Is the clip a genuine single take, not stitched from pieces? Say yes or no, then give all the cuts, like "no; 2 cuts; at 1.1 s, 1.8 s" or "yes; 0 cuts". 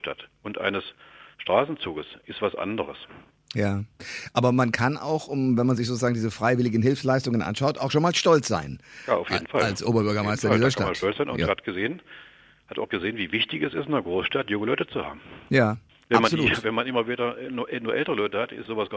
no; 1 cut; at 1.3 s